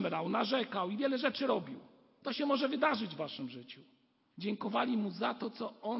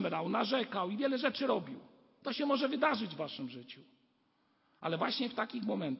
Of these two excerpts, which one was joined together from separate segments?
first; 1 cut; at 4.3 s

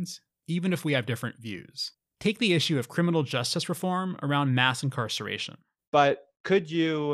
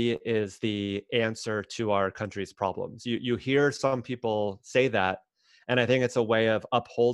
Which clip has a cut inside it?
first; 1 cut; at 5.9 s

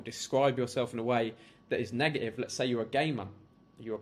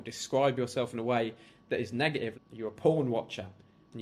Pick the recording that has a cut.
second; 1 cut; at 2.3 s

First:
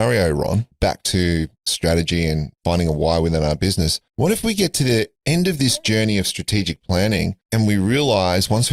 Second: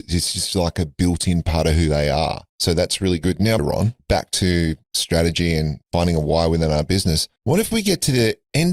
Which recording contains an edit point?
second; 1 cut; at 3.6 s

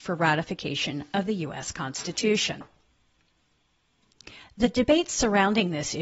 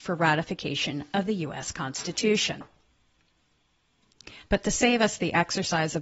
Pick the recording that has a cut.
second; 1 cut; at 4.4 s

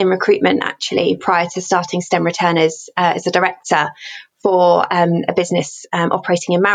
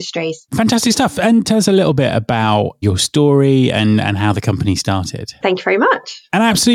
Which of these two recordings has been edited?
second; 1 cut; at 5.4 s

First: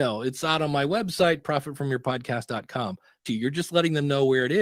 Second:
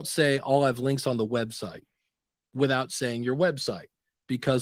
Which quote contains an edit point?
first; 1 cut; at 3.3 s

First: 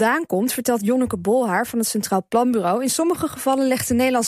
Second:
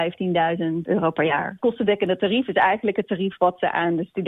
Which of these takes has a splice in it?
second; 1 cut; at 1.6 s

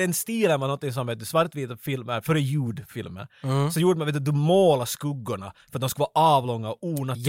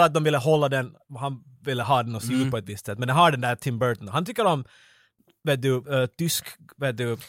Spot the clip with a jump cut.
second; 1 cut; at 5.8 s

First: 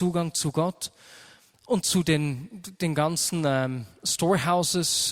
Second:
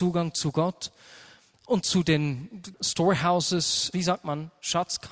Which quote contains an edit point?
second; 2 cuts; at 2.7 s, 3.9 s

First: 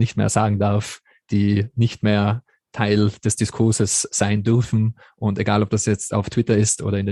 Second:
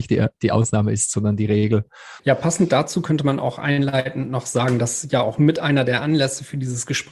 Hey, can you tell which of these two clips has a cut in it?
second; 1 cut; at 2.2 s

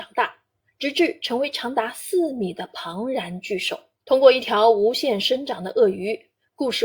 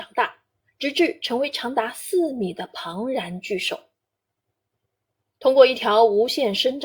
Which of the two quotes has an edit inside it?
first; 1 cut; at 3.9 s

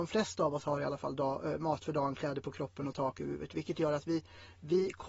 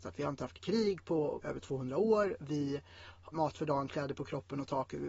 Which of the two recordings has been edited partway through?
second; 2 cuts; at 1.4 s, 3.3 s

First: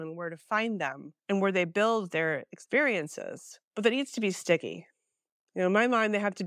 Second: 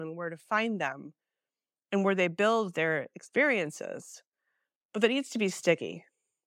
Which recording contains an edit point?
first; 2 cuts; at 1.2 s, 3.7 s

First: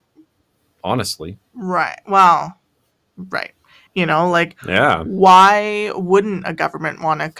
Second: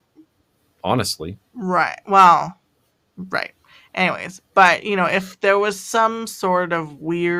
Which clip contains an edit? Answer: first; 1 cut; at 3.9 s

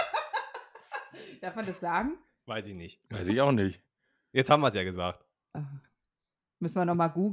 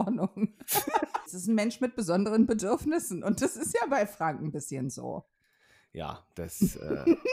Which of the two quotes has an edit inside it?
second; 1 cut; at 1.3 s

